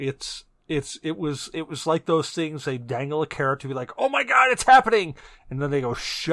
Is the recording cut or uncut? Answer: uncut